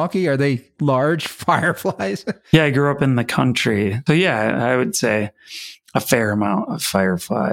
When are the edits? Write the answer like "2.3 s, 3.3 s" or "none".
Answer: 4.1 s